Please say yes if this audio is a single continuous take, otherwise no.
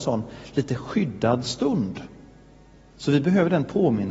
no